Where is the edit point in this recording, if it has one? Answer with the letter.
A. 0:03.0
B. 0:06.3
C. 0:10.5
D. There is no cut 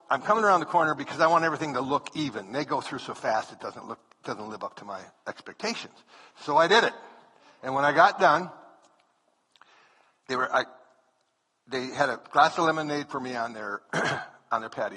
B